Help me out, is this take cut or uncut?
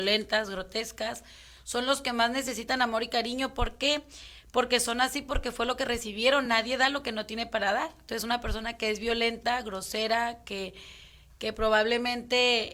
uncut